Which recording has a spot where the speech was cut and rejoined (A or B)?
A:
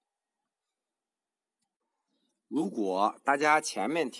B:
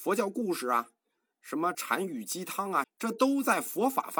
B